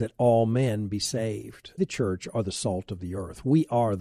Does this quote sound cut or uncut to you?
cut